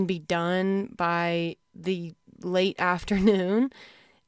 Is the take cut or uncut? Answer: cut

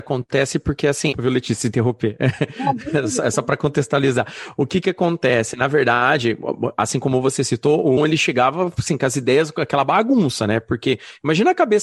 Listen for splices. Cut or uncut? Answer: cut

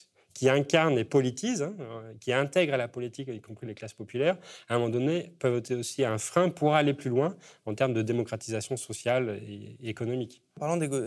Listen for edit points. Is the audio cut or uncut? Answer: uncut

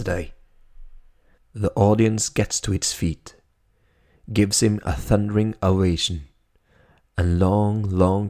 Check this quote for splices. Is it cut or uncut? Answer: cut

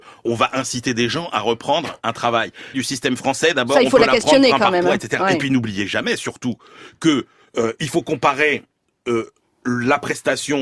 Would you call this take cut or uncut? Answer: cut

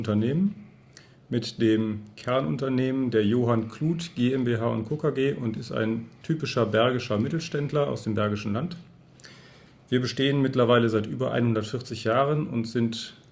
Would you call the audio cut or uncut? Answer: uncut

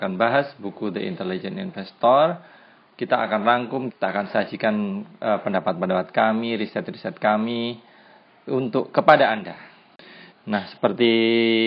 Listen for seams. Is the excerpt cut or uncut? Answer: cut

